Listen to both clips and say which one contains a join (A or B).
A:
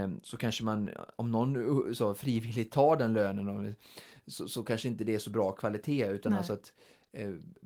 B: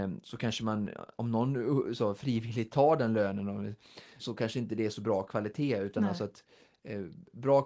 B